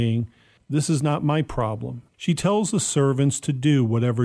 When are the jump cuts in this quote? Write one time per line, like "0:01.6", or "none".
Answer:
0:02.1